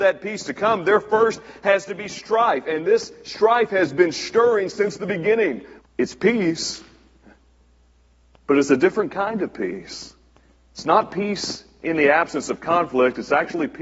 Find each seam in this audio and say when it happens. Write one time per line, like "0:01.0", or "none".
0:05.8